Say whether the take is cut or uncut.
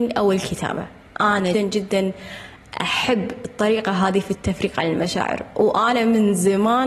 cut